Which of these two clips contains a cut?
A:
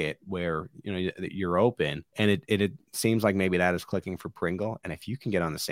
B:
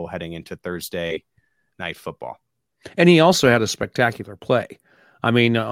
A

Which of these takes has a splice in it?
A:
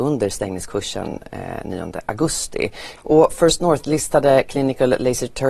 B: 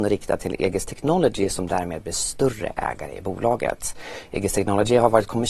A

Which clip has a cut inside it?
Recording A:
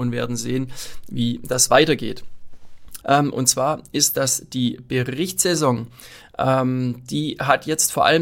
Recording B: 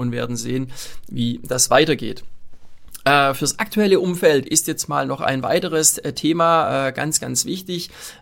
A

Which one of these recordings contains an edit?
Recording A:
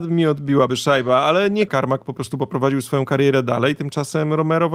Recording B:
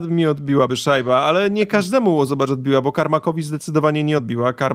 A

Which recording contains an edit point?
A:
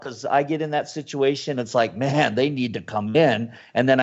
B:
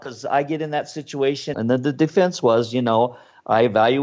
B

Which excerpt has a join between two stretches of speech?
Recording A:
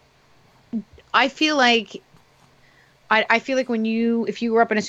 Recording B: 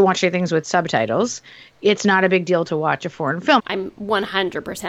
B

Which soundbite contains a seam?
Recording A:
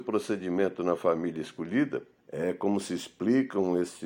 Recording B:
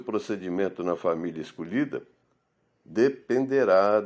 A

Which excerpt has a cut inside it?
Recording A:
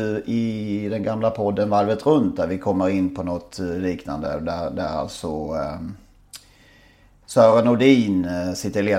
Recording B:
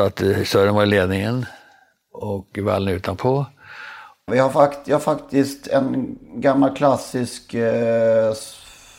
B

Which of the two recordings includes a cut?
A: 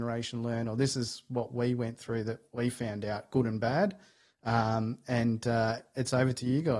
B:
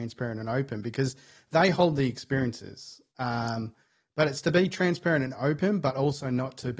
B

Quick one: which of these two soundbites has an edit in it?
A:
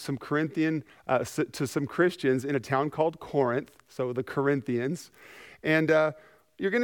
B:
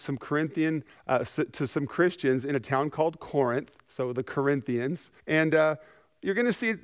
B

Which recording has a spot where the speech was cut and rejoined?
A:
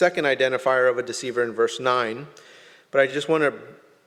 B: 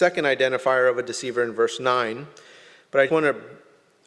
B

